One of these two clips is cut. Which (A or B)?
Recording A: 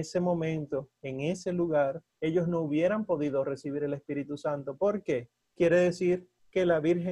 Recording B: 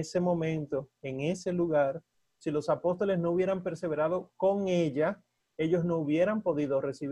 A